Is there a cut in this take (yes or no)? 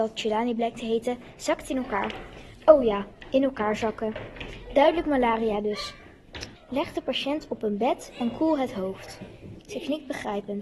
yes